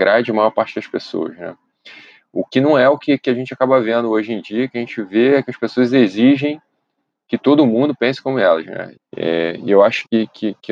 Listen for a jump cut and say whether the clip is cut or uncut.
cut